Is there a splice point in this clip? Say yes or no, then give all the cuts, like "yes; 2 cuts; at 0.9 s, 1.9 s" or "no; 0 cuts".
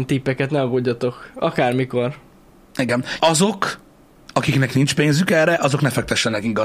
yes; 1 cut; at 3.2 s